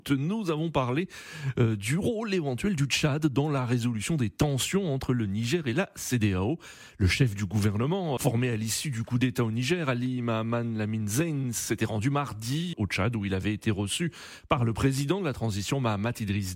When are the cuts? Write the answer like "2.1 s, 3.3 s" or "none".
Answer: 8.2 s, 12.7 s